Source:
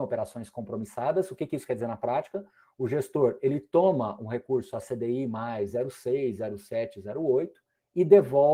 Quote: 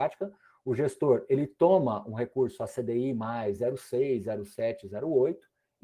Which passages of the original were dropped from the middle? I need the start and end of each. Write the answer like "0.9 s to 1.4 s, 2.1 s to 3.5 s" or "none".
none